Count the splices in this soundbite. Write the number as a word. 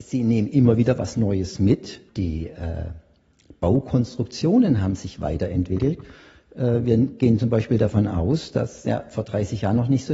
one